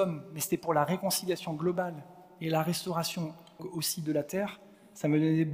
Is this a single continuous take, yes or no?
no